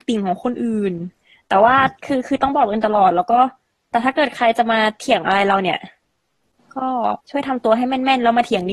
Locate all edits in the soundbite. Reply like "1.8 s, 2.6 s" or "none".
7.2 s